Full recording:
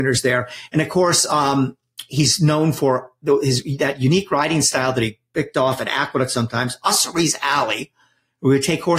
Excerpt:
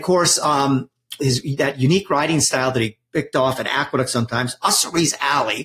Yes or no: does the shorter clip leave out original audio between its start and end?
yes